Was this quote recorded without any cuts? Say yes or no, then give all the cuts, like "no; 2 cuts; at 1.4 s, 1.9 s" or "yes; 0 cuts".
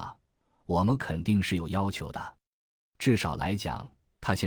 yes; 0 cuts